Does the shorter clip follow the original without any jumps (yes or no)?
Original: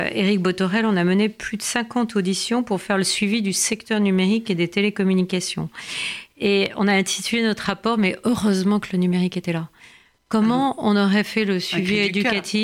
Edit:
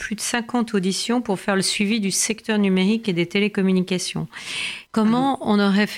no